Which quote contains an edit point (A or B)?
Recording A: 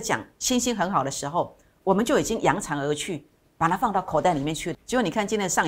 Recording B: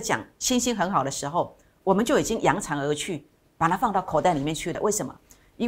A